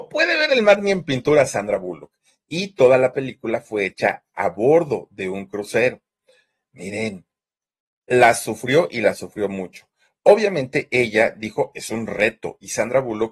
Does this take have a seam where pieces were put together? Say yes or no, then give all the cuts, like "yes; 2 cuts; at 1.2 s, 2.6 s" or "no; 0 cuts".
no; 0 cuts